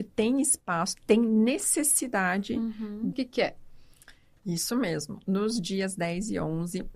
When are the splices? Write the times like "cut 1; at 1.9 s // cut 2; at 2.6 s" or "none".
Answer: cut 1; at 3.1 s

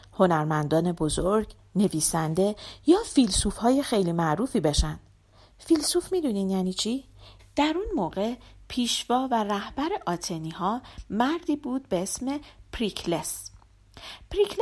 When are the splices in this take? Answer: cut 1; at 7.4 s

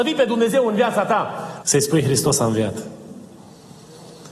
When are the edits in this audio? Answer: cut 1; at 1.6 s

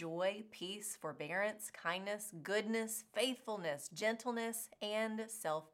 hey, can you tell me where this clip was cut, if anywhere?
none

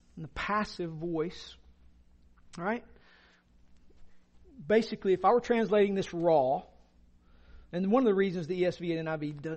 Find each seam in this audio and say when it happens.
none

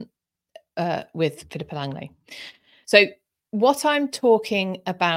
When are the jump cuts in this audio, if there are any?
cut 1; at 2.8 s

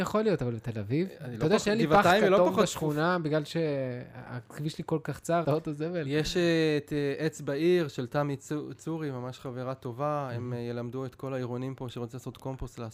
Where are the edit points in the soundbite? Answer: cut 1; at 5.4 s

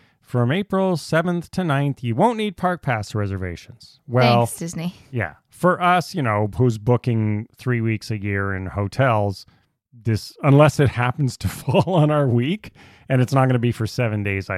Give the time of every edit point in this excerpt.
none

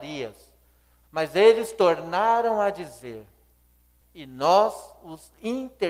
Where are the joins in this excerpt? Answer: cut 1; at 1.0 s // cut 2; at 4.0 s

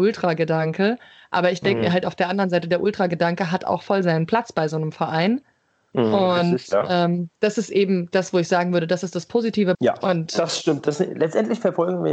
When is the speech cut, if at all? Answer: cut 1; at 7.3 s // cut 2; at 9.7 s

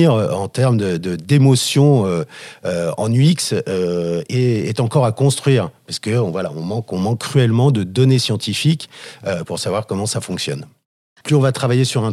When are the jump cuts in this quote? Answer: cut 1; at 11.2 s

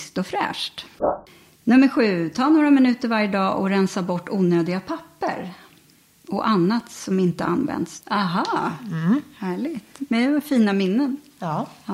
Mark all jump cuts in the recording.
cut 1; at 0.9 s // cut 2; at 8.0 s

